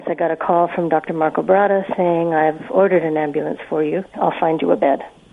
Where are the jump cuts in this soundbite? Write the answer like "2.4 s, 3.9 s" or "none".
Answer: 4.1 s